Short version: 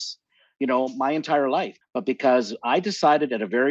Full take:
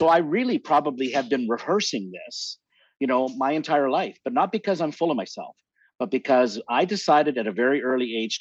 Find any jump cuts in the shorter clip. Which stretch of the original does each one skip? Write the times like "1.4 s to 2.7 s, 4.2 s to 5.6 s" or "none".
4.2 s to 5.9 s